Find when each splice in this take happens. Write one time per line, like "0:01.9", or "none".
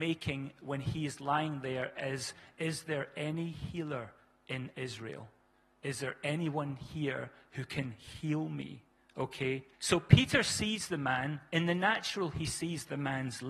0:09.7